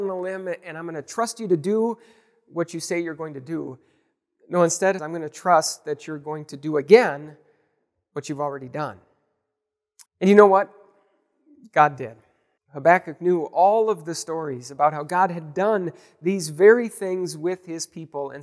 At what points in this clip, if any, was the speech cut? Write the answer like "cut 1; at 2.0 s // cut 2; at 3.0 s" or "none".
cut 1; at 5.0 s // cut 2; at 10.1 s // cut 3; at 12.6 s